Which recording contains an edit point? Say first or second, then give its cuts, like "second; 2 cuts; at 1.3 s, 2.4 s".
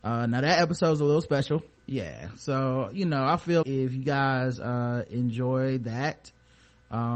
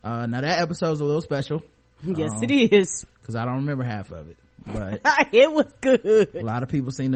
first; 2 cuts; at 1.8 s, 3.6 s